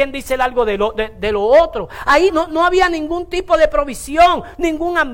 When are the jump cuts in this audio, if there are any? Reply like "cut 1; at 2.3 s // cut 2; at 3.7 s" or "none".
cut 1; at 2.3 s